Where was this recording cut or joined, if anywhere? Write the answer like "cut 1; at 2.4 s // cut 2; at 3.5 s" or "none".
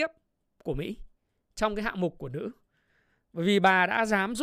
none